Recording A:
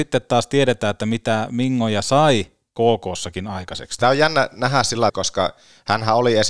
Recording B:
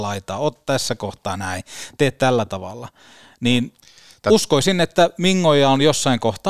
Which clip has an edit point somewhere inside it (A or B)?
A